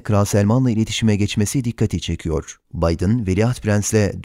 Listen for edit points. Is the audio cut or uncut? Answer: cut